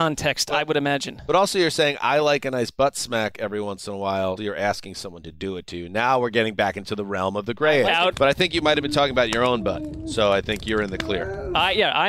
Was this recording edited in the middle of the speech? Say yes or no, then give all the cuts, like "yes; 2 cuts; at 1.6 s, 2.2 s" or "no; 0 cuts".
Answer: yes; 2 cuts; at 4.4 s, 8.1 s